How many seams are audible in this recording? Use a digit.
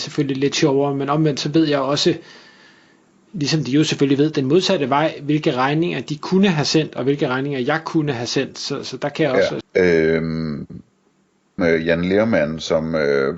2